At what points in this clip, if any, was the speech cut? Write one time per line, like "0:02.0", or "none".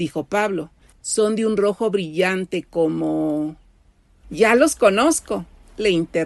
0:00.9
0:04.2